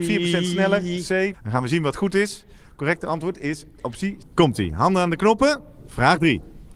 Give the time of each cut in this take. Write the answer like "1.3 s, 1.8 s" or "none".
1.3 s, 4.2 s